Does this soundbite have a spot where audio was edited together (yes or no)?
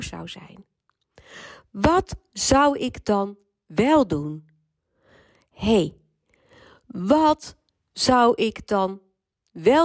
no